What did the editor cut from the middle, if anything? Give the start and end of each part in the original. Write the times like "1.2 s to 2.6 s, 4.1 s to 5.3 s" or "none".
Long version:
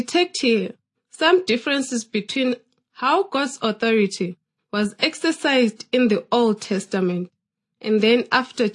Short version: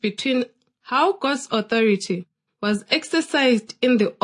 none